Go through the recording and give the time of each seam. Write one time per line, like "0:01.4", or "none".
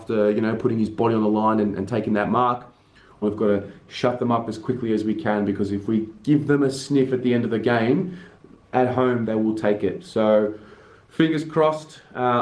0:03.2